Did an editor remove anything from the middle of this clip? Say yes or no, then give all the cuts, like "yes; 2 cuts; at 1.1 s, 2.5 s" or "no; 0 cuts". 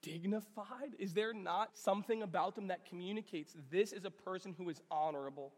yes; 1 cut; at 1.7 s